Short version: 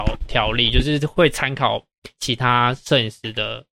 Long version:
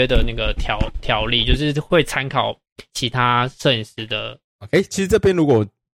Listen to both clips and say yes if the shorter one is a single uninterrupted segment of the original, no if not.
yes